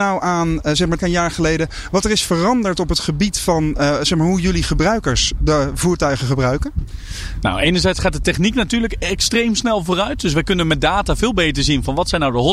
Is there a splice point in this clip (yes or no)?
yes